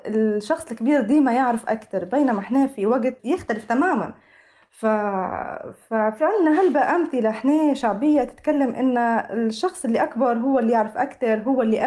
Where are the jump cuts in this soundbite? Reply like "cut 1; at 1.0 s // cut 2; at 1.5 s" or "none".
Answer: cut 1; at 3.2 s

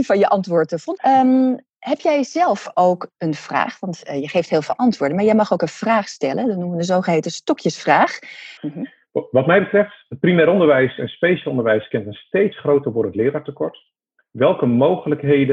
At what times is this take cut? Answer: cut 1; at 1.0 s // cut 2; at 8.6 s

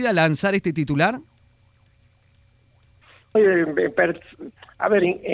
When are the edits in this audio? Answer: cut 1; at 3.3 s

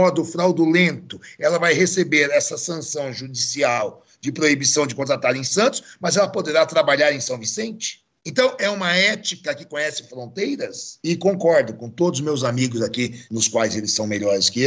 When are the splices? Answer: cut 1; at 8.2 s // cut 2; at 11.0 s // cut 3; at 13.3 s

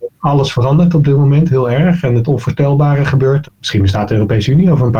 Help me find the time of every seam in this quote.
cut 1; at 3.4 s

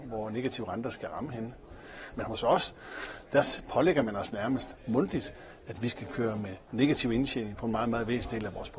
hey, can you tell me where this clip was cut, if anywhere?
cut 1; at 2.1 s

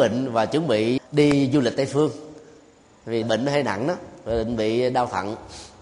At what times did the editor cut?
cut 1; at 1.0 s // cut 2; at 3.2 s

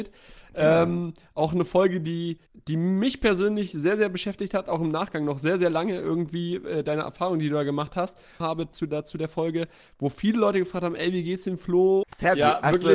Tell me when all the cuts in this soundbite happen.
cut 1; at 2.5 s // cut 2; at 8.4 s // cut 3; at 12.0 s

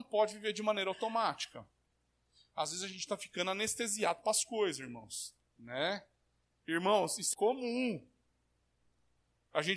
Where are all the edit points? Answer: cut 1; at 5.5 s // cut 2; at 7.3 s

